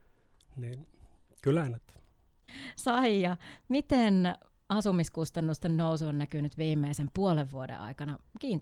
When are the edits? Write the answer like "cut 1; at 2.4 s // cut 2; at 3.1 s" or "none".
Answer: none